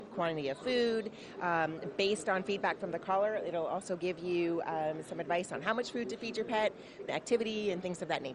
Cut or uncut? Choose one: cut